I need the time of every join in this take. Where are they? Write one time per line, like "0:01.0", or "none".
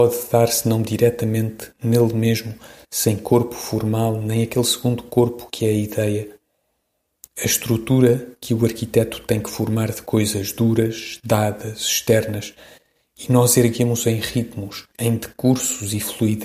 0:14.9